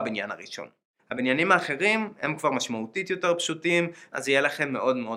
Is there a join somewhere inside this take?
yes; 2 cuts; at 1.0 s, 4.1 s

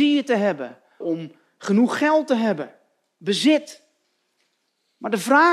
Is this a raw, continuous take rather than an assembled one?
no; 1 cut; at 1.0 s

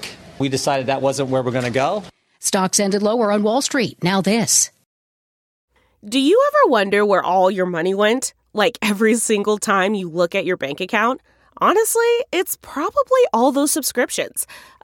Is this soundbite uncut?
yes; 0 cuts

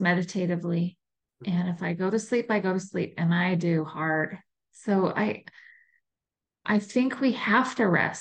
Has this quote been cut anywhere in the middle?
no; 0 cuts

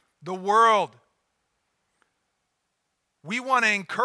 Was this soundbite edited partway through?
no; 0 cuts

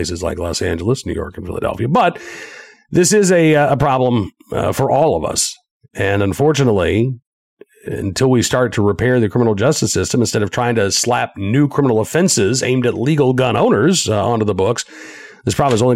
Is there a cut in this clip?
no; 0 cuts

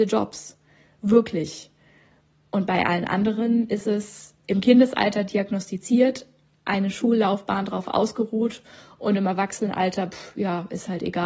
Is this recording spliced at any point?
yes; 1 cut; at 4.4 s

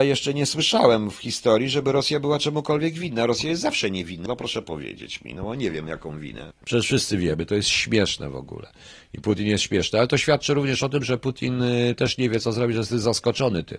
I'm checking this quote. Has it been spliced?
yes; 2 cuts; at 4.3 s, 6.5 s

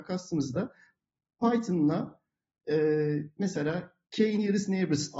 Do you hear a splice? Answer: yes; 1 cut; at 4.1 s

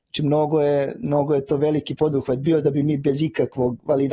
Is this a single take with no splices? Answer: yes; 0 cuts

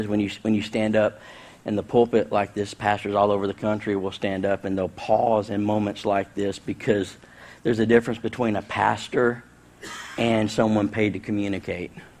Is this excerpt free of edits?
yes; 0 cuts

